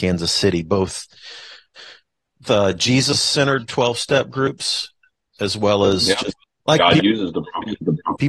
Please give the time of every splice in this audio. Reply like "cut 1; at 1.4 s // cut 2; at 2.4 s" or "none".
cut 1; at 6.4 s